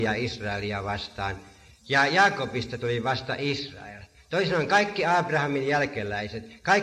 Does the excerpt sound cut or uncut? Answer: uncut